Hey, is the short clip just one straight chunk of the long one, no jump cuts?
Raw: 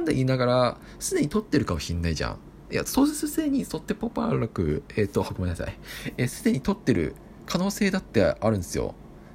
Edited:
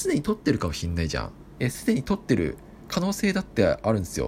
no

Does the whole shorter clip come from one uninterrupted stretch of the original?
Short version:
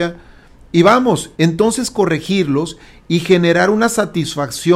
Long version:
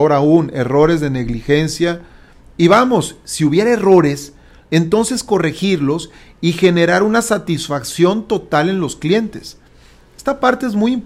no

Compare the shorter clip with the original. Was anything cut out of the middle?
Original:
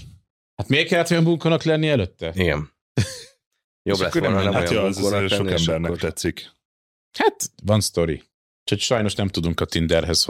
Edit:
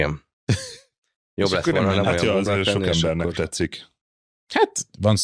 yes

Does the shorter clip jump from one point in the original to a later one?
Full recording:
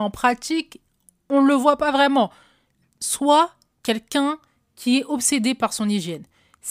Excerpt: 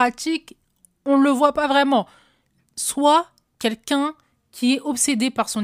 no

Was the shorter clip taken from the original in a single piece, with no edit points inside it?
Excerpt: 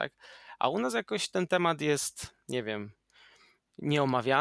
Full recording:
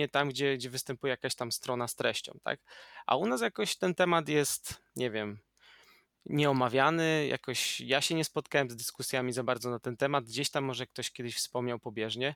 yes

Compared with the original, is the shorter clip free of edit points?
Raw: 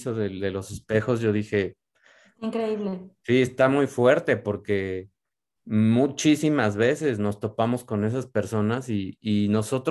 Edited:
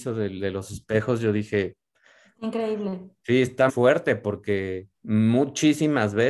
no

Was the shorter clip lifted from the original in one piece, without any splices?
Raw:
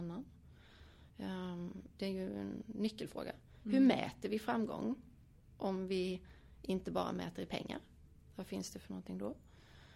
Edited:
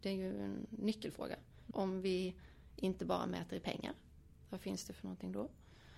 no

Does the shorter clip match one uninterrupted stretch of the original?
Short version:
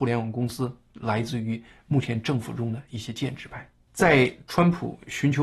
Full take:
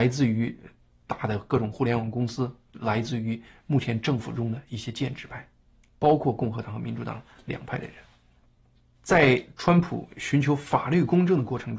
no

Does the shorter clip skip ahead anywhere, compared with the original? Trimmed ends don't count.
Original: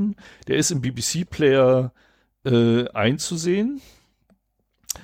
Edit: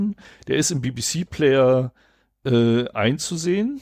no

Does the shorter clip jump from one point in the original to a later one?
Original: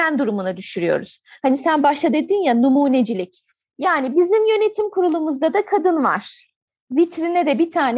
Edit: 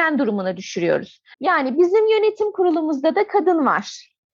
yes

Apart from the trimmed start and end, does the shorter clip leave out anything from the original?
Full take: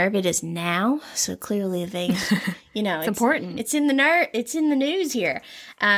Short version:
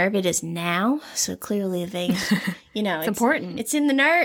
no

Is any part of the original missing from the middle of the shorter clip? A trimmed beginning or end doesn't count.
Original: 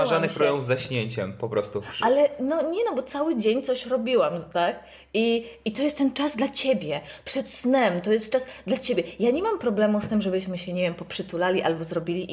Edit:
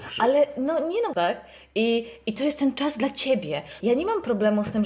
yes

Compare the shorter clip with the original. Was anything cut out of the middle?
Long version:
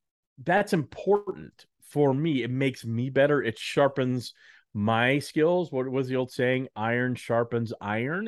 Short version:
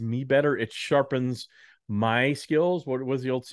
no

